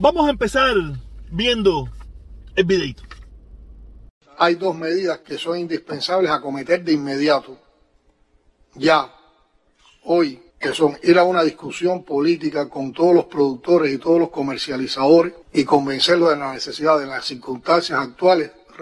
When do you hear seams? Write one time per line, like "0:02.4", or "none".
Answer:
0:10.5
0:15.4